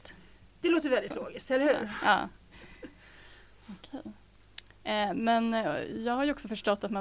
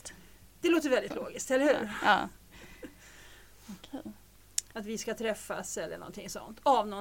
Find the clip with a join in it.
second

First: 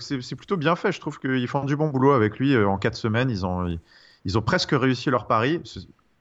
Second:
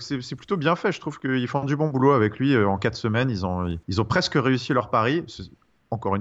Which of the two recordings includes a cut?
second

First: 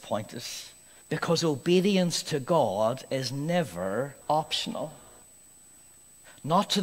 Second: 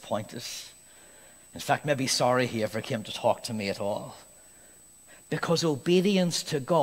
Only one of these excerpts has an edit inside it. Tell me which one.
first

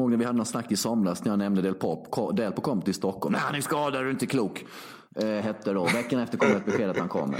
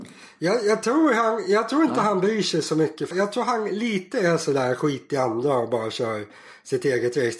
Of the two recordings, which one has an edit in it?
second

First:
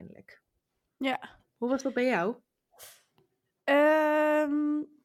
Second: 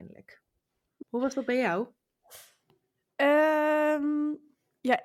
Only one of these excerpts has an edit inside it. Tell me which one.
second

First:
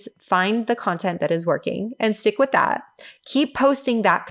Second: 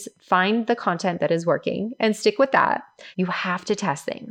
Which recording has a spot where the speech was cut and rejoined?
second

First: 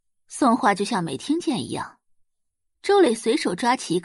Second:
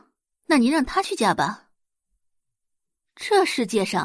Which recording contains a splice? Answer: second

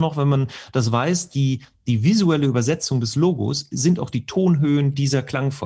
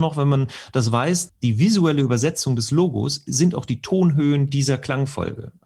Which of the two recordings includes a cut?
second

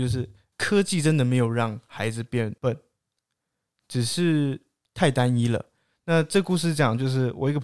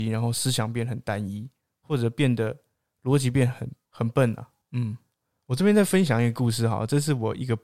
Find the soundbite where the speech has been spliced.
second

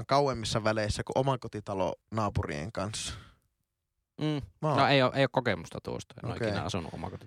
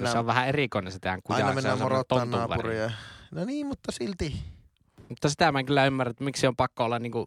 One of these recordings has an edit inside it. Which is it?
first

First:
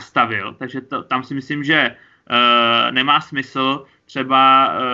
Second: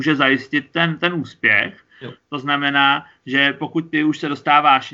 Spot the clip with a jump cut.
second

